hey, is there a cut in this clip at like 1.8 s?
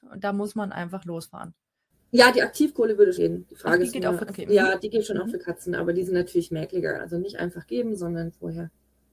no; 3 cuts; at 3.2 s, 4.3 s, 7.0 s

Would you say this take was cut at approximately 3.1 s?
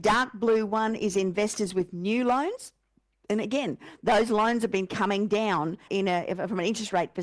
no; 1 cut; at 5.9 s

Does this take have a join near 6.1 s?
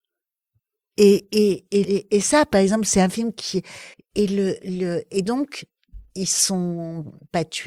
no; 2 cuts; at 1.8 s, 3.9 s

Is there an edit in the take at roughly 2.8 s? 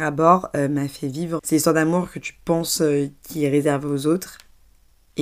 no; 1 cut; at 1.4 s

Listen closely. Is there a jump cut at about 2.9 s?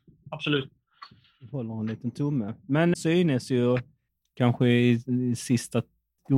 yes; 1 cut; at 2.9 s

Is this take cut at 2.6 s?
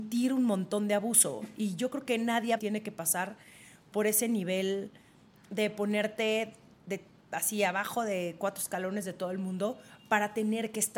yes; 1 cut; at 2.6 s

